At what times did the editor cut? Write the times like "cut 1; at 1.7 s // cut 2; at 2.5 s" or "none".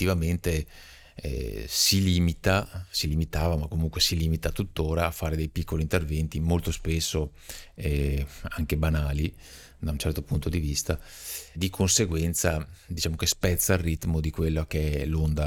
cut 1; at 11.5 s